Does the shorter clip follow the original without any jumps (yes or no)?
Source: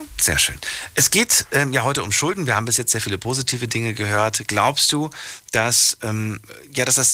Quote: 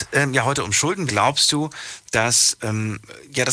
no